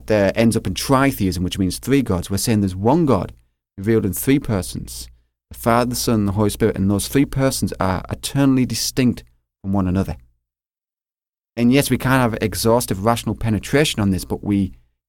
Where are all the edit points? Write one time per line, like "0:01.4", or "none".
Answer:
none